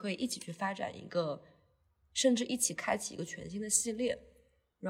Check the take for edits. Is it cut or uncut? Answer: uncut